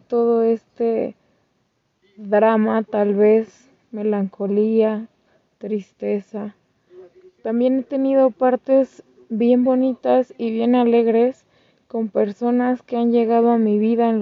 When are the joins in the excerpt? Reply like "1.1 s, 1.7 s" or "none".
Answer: none

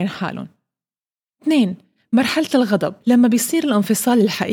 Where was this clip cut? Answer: 3.0 s

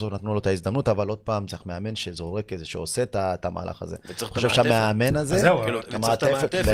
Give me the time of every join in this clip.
1.5 s, 5.8 s

